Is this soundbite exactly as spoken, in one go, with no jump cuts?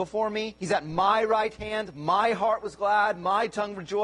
yes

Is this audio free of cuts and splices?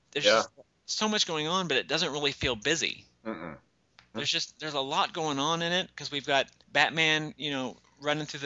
no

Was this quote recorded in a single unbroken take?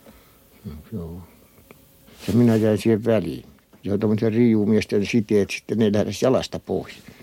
no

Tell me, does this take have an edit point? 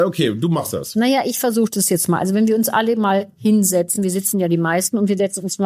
no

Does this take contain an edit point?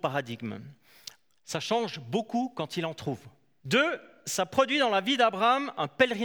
yes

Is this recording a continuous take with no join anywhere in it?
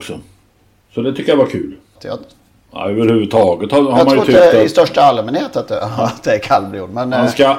no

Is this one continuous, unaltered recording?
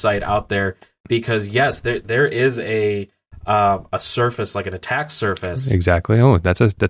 yes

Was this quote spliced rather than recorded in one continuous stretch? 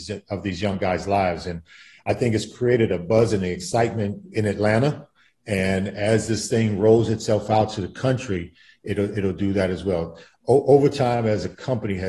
no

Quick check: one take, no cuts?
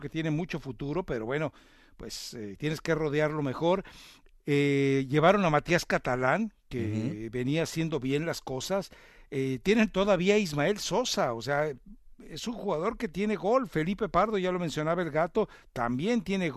yes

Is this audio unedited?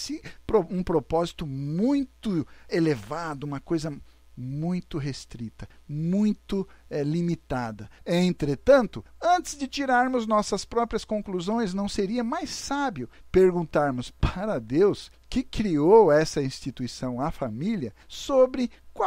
no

